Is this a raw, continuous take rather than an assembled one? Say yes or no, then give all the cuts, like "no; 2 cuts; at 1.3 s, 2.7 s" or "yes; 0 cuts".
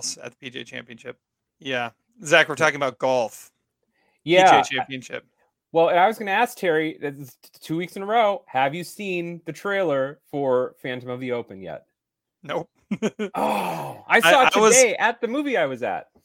no; 1 cut; at 1.5 s